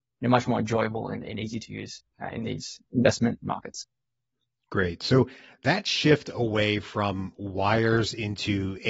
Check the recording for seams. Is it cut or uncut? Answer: uncut